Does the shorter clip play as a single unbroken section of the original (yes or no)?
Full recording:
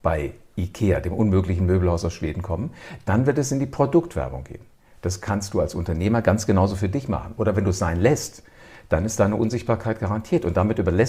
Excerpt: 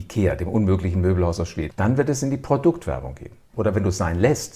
no